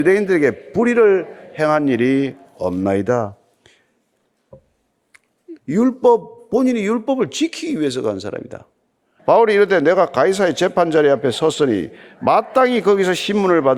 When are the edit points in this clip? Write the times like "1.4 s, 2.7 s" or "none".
5.6 s, 9.2 s

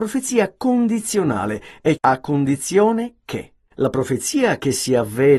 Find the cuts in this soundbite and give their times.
2.0 s, 3.7 s

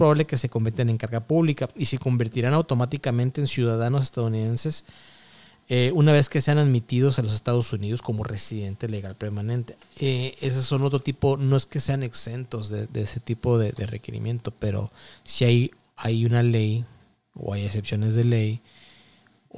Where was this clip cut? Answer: 9.8 s

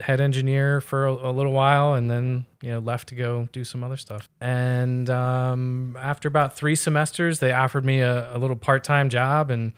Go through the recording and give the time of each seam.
4.3 s

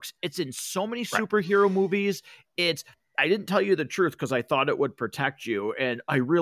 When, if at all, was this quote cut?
none

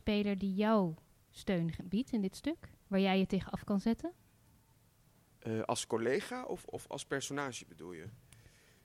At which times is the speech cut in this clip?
2.8 s

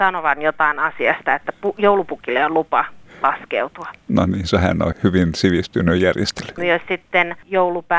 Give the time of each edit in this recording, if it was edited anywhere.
4.9 s, 6.6 s

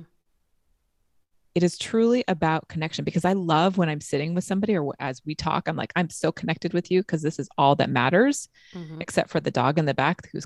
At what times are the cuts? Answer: 1.5 s

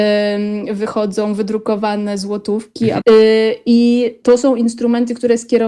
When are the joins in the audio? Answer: 3.0 s, 4.2 s

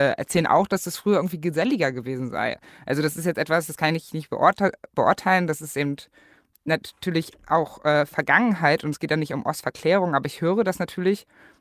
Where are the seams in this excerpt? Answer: none

